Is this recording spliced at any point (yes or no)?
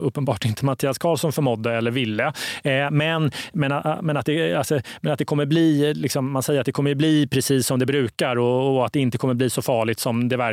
no